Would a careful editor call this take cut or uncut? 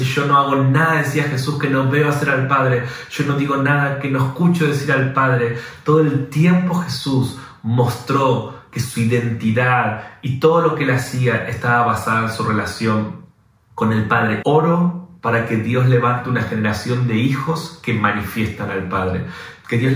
cut